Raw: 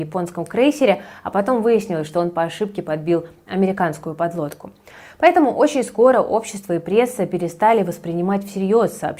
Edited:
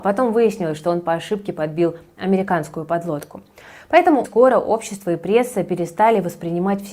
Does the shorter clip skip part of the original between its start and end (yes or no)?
yes